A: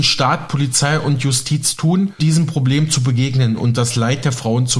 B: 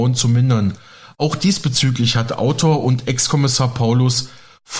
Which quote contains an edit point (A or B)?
A